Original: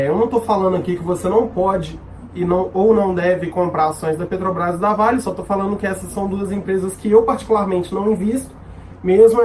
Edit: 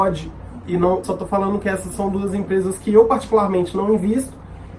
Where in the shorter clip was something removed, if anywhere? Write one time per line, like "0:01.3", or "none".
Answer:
0:01.0